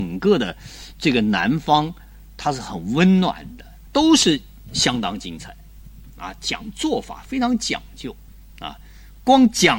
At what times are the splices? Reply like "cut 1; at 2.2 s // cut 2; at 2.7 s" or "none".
cut 1; at 3.9 s